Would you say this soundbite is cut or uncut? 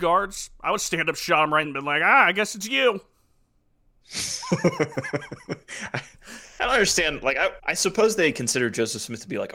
cut